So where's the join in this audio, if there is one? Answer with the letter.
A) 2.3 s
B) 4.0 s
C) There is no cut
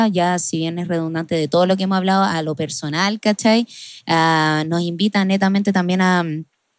C